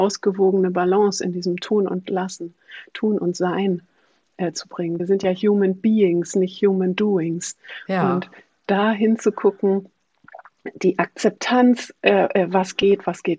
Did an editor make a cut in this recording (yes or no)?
no